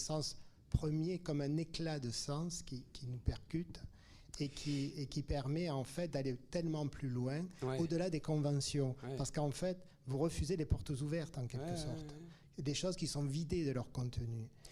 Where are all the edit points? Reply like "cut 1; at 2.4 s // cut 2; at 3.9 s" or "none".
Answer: none